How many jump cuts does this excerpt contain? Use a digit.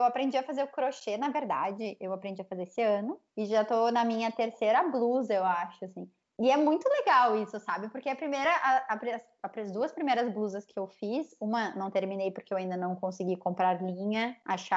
0